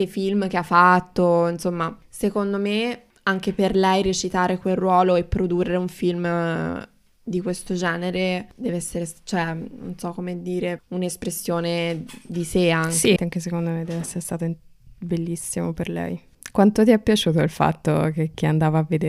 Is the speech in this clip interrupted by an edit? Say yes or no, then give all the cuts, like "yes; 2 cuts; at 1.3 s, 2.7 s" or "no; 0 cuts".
yes; 2 cuts; at 10.8 s, 13.2 s